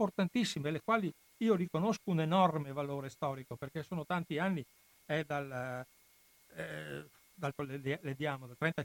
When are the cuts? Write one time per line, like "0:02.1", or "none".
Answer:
0:07.5